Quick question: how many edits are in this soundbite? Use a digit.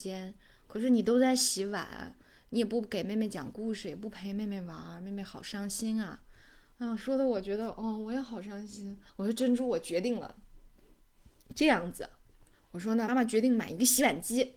2